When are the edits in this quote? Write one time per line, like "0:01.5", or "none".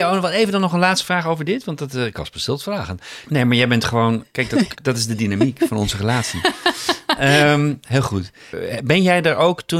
0:03.2
0:04.7